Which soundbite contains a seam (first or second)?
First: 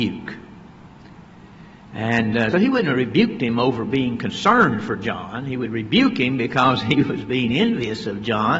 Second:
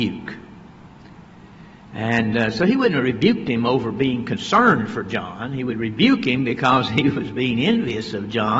first